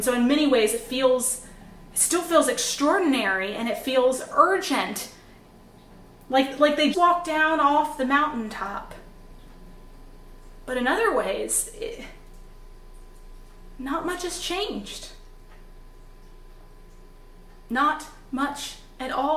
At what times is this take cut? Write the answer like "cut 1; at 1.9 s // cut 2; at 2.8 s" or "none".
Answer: cut 1; at 6.9 s